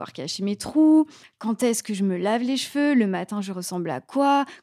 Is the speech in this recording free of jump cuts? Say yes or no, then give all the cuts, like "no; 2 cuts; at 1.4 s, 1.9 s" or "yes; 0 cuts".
yes; 0 cuts